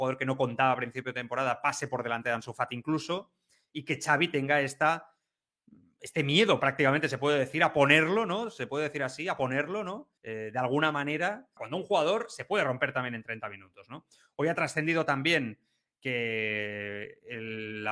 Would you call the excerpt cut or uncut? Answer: cut